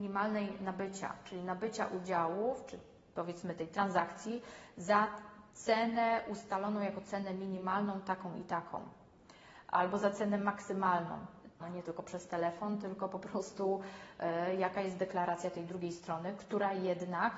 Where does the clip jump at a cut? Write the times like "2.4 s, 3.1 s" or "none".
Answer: 11.6 s